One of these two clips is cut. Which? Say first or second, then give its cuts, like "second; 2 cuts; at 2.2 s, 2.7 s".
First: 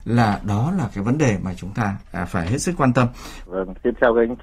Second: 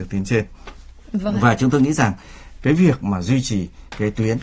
first; 1 cut; at 3.5 s